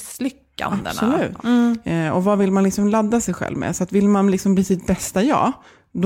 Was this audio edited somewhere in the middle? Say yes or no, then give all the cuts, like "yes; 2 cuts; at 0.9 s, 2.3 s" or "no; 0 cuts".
yes; 1 cut; at 1.4 s